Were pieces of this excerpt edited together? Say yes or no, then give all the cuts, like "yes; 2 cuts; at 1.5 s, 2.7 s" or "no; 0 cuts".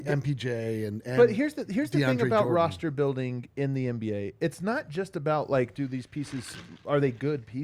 no; 0 cuts